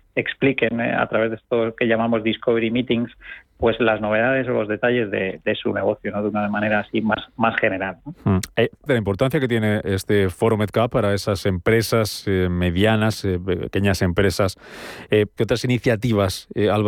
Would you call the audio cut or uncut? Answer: cut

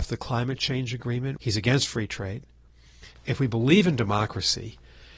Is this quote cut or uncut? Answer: cut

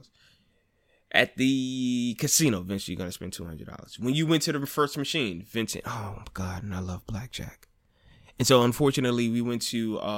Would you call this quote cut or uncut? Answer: uncut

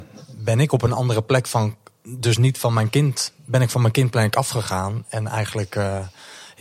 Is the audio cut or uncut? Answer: uncut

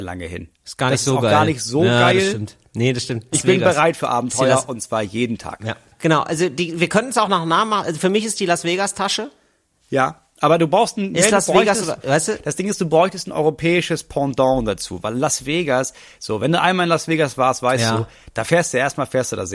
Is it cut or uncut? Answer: cut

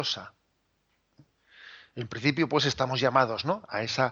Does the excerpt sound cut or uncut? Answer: uncut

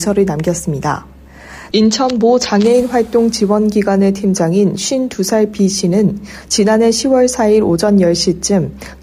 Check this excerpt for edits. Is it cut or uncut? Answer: cut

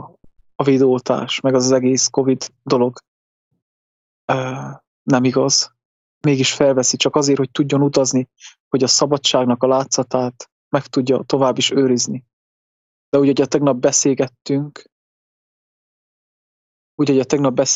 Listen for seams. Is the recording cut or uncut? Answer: uncut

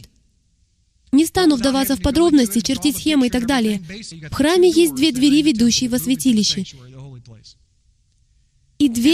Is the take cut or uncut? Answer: cut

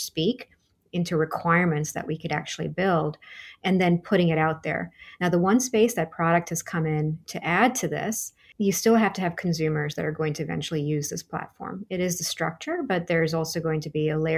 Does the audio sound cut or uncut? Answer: uncut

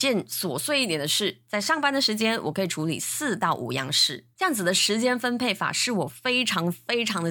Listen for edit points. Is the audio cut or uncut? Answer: cut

